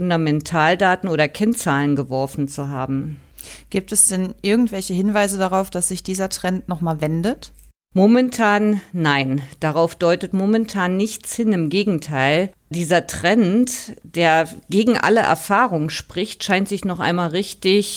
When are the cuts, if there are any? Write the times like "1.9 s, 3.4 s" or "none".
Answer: none